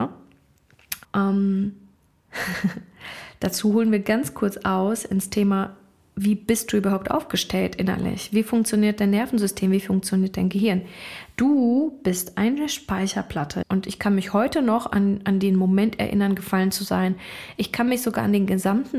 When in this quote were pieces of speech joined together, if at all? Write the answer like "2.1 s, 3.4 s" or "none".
1.0 s, 13.6 s, 17.6 s